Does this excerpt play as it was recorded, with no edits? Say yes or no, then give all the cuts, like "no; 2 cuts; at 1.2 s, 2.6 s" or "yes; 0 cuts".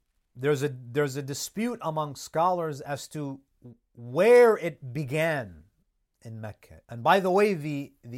no; 1 cut; at 6.8 s